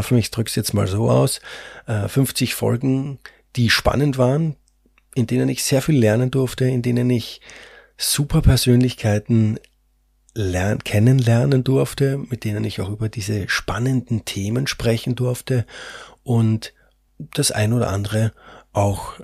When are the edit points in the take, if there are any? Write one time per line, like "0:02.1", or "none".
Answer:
none